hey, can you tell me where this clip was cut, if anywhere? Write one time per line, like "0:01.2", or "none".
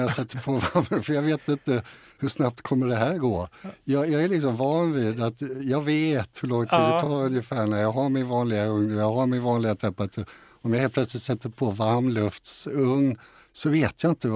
none